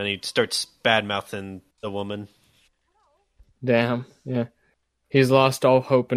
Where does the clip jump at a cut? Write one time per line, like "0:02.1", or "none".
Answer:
0:01.7